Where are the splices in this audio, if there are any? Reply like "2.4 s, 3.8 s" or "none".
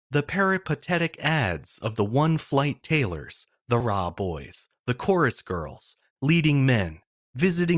3.8 s, 6.1 s